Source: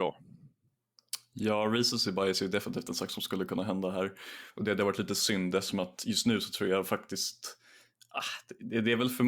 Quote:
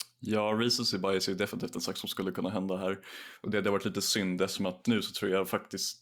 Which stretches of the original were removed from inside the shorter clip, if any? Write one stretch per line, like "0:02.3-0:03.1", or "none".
0:06.0-0:06.2